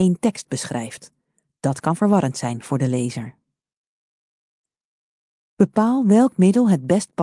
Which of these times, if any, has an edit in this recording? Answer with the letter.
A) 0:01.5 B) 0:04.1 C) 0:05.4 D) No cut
D